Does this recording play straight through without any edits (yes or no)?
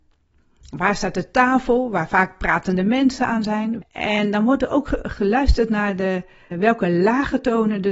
no